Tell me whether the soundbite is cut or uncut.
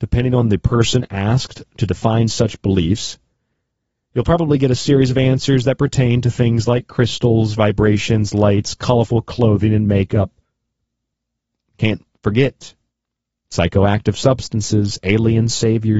uncut